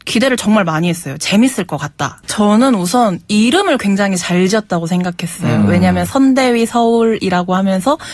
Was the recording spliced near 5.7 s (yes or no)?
no